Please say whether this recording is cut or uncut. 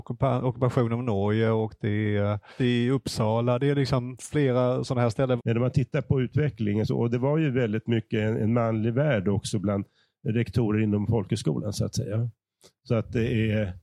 cut